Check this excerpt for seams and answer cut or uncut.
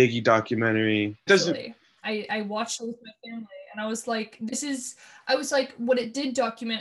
cut